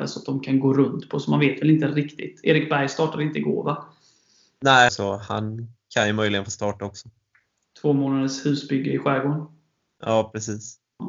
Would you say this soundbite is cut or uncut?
cut